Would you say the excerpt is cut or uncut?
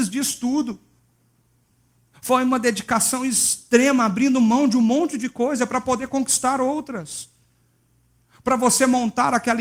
uncut